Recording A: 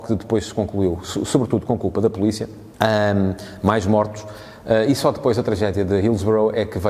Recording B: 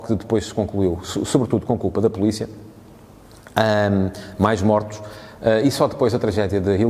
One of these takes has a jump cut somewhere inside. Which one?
A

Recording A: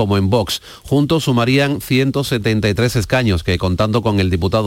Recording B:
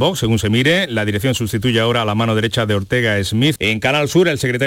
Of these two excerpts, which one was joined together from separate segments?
B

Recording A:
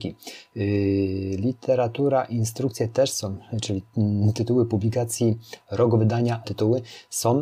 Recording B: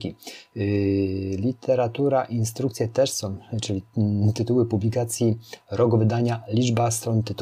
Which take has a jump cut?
A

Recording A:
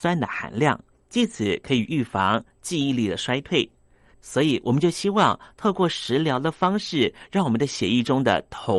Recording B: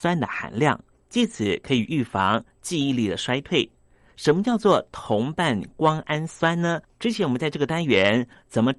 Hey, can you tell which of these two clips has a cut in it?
A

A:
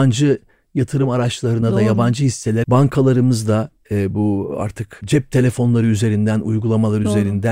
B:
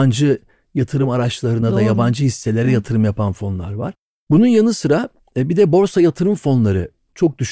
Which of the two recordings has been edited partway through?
A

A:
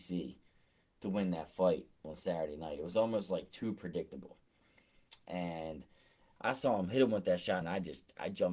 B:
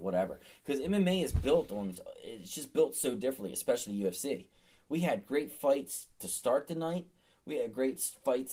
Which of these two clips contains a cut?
A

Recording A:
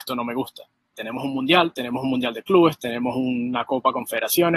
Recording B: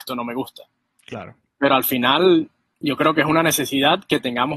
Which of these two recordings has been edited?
A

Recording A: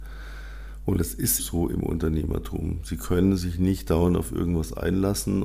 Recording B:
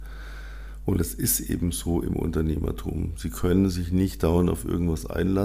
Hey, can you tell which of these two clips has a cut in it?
A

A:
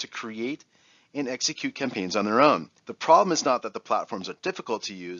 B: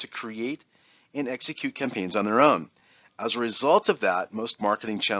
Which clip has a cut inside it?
A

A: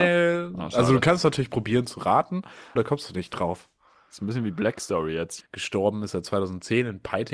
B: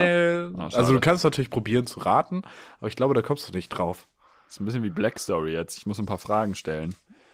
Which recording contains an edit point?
A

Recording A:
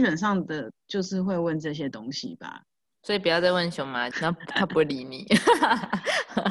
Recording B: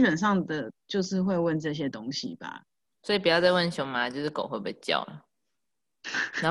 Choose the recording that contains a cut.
A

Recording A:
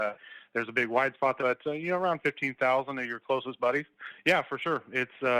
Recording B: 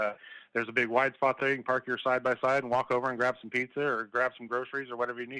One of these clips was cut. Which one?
A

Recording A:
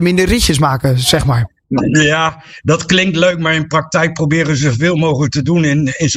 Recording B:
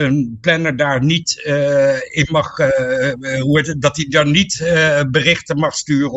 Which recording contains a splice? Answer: A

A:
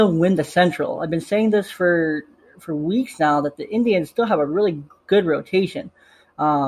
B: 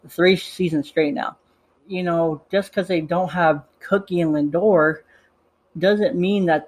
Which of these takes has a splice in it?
B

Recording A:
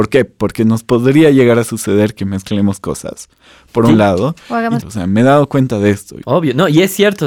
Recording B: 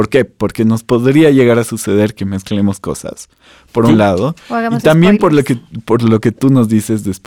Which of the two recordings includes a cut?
A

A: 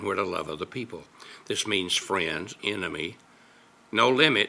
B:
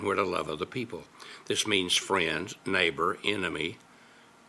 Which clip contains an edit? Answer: A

